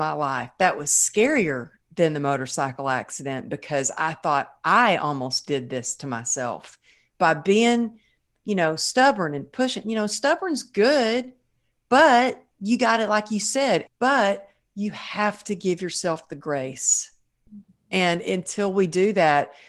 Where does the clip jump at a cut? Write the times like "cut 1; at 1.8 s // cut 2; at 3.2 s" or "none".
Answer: cut 1; at 13.9 s